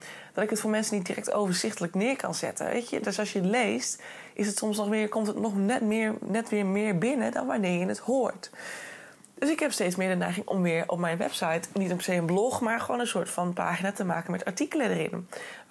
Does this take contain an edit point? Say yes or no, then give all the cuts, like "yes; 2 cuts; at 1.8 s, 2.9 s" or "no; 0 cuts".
no; 0 cuts